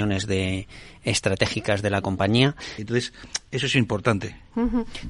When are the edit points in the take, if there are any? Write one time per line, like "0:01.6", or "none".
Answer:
0:02.8